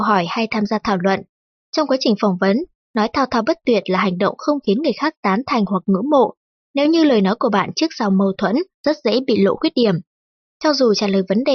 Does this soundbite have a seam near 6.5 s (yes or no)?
yes